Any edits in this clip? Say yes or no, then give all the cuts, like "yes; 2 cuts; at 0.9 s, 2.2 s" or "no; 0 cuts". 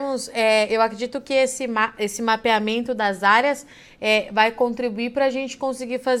no; 0 cuts